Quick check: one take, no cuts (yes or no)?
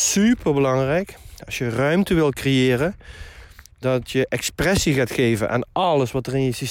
yes